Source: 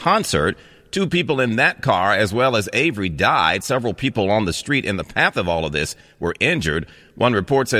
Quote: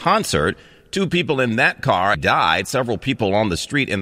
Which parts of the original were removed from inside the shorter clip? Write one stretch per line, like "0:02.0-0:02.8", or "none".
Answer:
0:02.1-0:03.1